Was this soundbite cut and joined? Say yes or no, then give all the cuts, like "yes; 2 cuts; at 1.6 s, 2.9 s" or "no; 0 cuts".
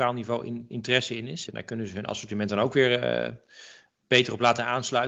yes; 1 cut; at 1.5 s